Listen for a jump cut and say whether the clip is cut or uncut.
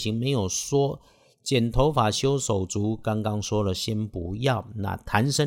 uncut